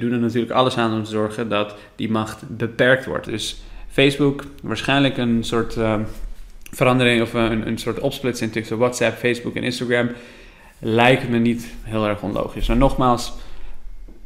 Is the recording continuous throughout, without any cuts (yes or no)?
no